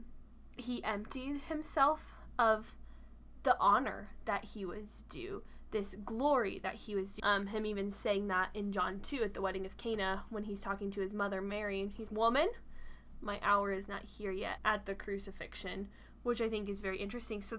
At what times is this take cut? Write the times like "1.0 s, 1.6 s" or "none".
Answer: 7.2 s, 12.1 s, 14.6 s